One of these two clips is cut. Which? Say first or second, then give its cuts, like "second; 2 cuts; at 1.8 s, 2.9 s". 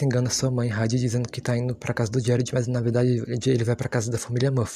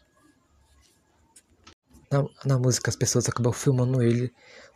second; 1 cut; at 2.0 s